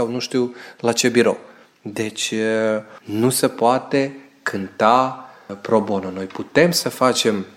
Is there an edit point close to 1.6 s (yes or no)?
no